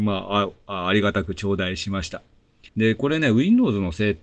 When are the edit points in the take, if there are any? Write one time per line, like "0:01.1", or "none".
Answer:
0:02.7